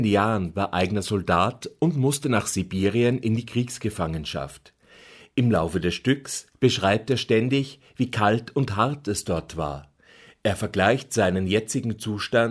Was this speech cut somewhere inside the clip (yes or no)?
no